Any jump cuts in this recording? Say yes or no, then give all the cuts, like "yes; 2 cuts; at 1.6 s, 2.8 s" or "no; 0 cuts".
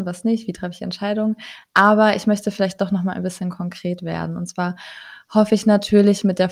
no; 0 cuts